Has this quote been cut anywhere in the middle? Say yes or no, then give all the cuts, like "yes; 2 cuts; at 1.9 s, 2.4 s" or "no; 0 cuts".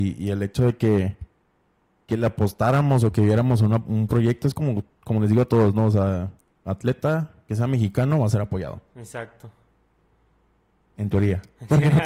no; 0 cuts